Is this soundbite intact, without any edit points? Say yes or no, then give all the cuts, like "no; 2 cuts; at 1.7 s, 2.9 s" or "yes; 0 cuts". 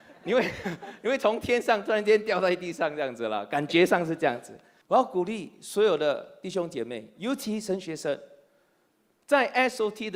no; 1 cut; at 4.8 s